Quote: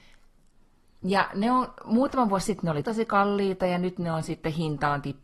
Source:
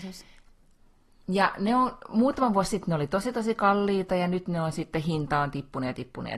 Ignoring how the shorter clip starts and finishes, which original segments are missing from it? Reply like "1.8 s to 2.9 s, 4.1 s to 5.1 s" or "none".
3.1 s to 3.3 s